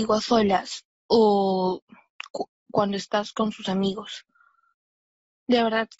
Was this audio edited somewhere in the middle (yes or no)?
no